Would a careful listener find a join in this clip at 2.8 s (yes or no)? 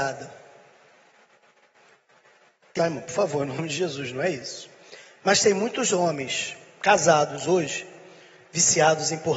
yes